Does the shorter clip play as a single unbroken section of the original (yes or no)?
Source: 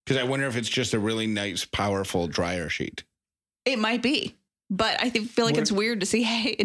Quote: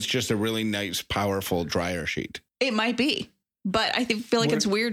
no